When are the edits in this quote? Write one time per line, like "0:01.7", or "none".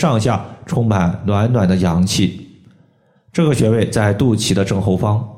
none